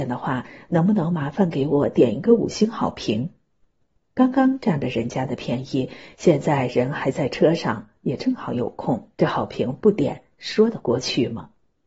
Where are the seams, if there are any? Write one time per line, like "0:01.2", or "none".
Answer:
0:09.1